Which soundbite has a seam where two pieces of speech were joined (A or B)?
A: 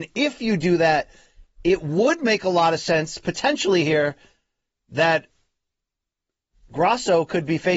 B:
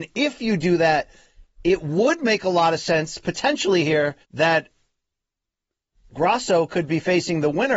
B